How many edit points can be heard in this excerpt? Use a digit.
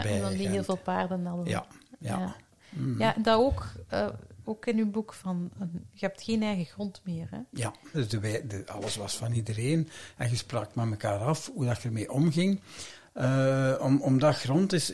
1